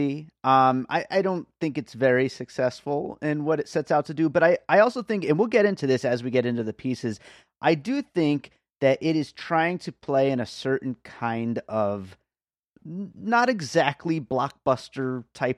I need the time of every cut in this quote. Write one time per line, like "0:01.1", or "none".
none